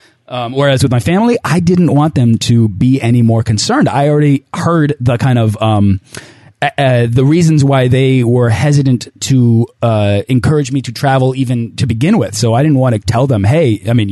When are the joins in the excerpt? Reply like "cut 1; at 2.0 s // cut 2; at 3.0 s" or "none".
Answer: none

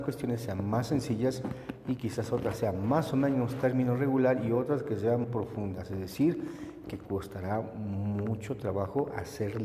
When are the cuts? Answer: cut 1; at 5.2 s

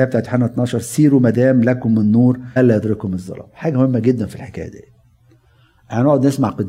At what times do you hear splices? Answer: cut 1; at 2.6 s

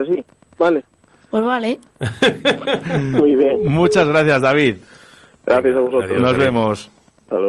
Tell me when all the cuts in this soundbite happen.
none

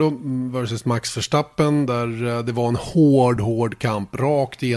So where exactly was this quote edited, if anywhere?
cut 1; at 3.4 s

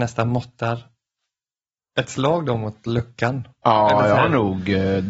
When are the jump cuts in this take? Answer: none

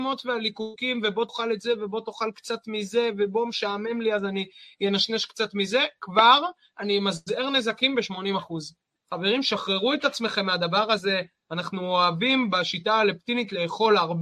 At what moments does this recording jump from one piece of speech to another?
cut 1; at 9.0 s

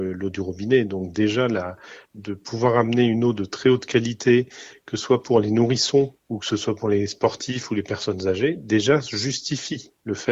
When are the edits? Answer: cut 1; at 2.1 s

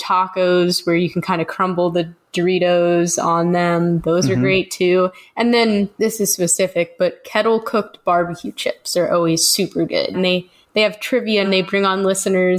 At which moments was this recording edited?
cut 1; at 5.9 s // cut 2; at 10.1 s // cut 3; at 11.4 s

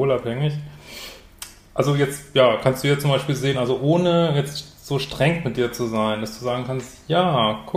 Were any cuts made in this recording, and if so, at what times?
none

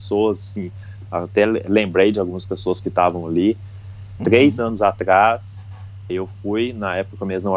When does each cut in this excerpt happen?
cut 1; at 4.2 s // cut 2; at 6.1 s

